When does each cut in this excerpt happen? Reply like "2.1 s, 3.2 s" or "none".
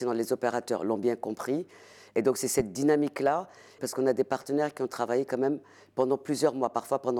3.8 s